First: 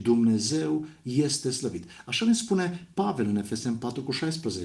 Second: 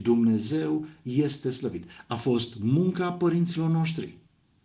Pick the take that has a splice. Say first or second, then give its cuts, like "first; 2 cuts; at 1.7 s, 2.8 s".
second; 1 cut; at 2.0 s